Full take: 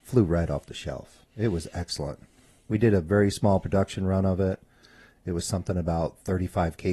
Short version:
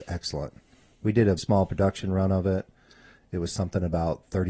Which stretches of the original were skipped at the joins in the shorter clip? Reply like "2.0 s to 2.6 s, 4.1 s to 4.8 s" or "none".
3.0 s to 3.3 s